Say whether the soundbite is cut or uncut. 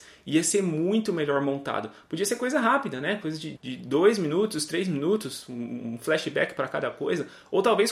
cut